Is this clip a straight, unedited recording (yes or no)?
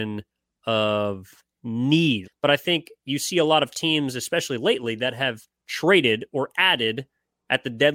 no